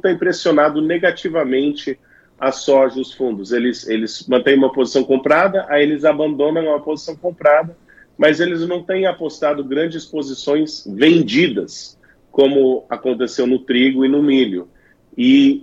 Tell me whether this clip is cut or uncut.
uncut